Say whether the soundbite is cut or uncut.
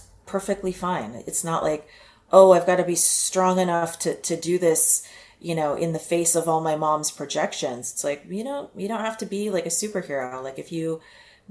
uncut